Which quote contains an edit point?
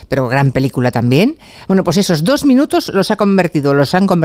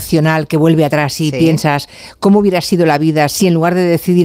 first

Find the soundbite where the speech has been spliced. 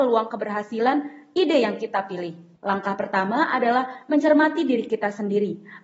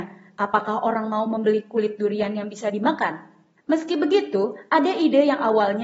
first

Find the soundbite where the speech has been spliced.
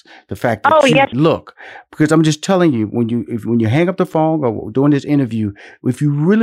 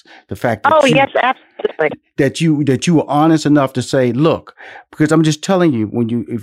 first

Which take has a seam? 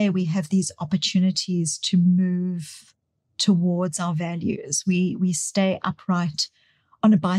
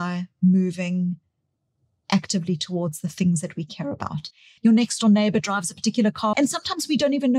second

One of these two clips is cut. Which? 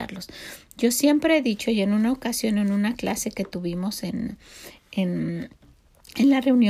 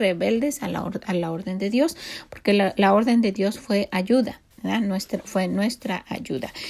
second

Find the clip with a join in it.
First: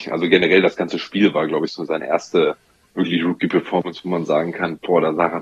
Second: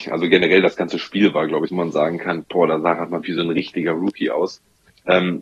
second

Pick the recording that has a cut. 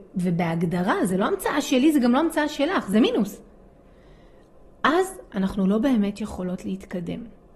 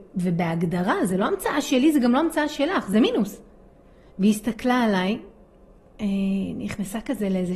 second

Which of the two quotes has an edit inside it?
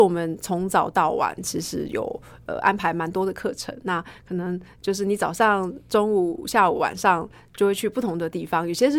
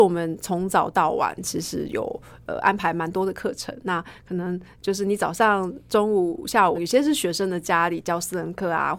second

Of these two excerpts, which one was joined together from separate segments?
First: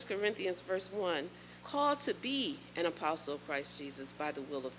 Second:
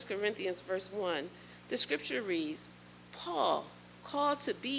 first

